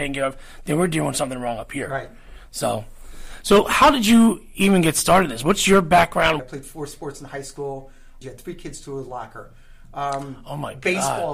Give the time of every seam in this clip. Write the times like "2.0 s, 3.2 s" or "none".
6.4 s, 8.2 s